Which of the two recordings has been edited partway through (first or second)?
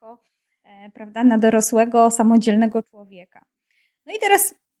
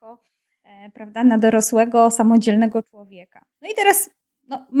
second